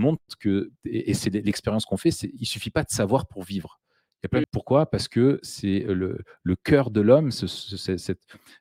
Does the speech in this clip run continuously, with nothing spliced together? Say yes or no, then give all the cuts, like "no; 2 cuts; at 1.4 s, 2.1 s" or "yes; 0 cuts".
no; 1 cut; at 4.4 s